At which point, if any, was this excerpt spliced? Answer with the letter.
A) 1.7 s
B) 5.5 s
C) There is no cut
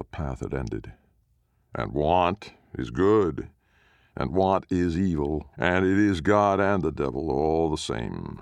B